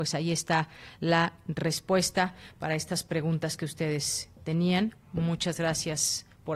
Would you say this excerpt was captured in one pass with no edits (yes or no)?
yes